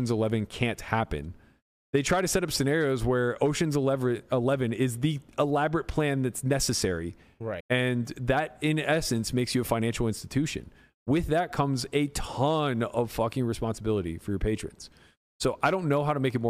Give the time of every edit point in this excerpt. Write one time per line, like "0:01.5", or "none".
0:07.6